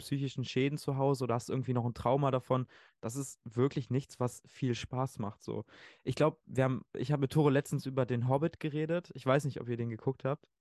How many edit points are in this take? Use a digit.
0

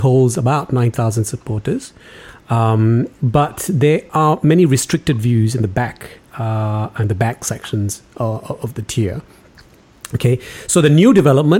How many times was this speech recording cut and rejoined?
0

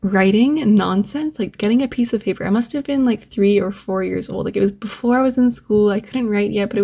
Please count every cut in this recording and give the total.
0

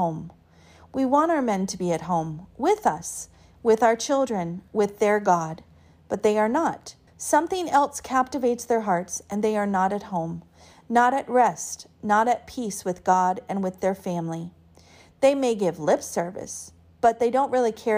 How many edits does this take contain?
1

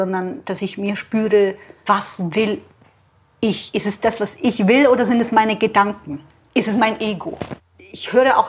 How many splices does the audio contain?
1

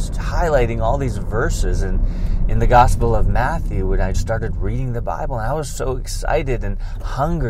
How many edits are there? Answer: 1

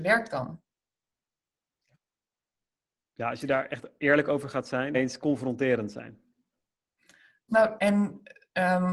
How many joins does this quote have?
2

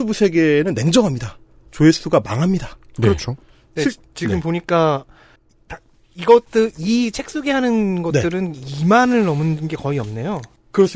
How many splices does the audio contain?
0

